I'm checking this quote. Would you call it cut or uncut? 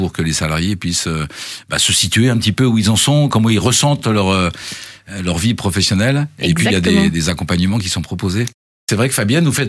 uncut